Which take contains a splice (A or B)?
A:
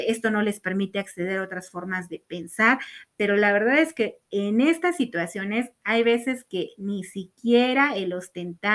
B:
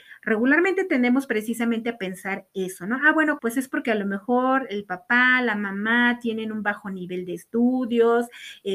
B